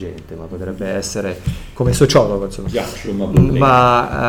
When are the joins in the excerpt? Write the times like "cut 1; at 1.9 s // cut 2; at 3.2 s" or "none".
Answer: none